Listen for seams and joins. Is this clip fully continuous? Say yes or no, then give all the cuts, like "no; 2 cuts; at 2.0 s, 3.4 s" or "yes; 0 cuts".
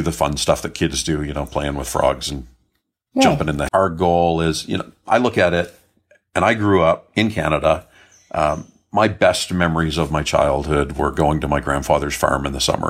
no; 1 cut; at 3.7 s